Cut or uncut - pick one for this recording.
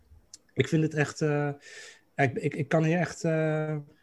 uncut